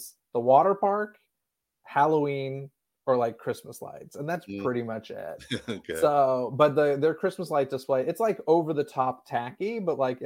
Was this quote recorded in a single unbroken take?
yes; 0 cuts

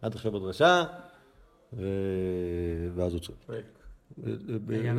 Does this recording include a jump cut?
yes; 1 cut; at 3.4 s

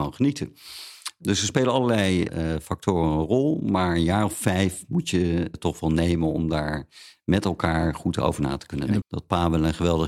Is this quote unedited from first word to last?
no; 2 cuts; at 5.5 s, 9.0 s

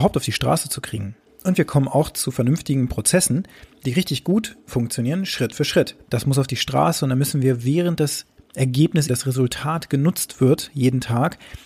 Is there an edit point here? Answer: yes; 3 cuts; at 1.3 s, 6.0 s, 9.1 s

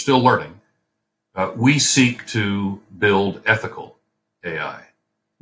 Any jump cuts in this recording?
no; 0 cuts

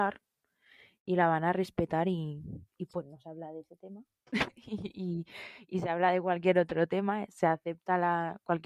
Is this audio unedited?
no; 1 cut; at 2.9 s

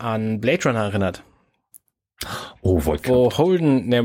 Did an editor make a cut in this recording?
no; 0 cuts

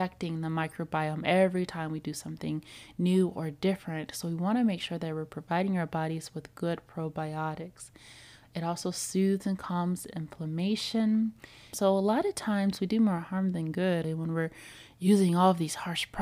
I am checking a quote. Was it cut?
yes; 2 cuts; at 11.7 s, 14.0 s

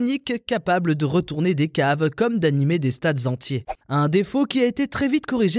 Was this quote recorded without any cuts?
no; 1 cut; at 3.8 s

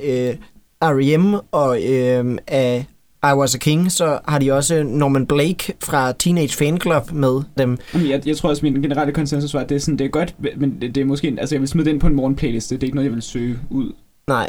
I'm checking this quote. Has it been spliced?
yes; 1 cut; at 7.6 s

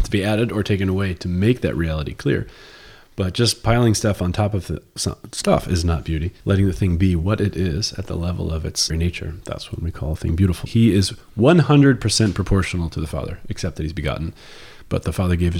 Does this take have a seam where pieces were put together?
yes; 3 cuts; at 6.4 s, 8.9 s, 10.7 s

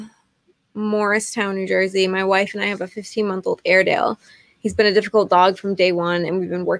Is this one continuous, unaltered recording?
yes; 0 cuts

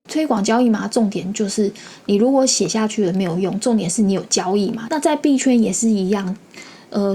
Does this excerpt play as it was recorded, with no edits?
no; 1 cut; at 4.9 s

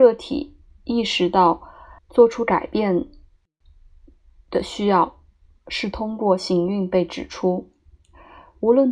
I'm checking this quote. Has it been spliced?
yes; 1 cut; at 2.0 s

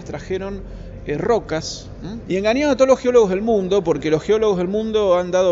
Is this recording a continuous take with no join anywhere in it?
no; 1 cut; at 2.3 s

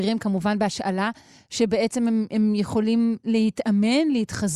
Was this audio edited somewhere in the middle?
no; 0 cuts

